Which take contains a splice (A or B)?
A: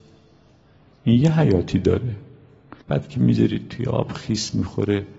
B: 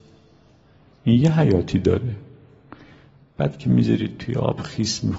A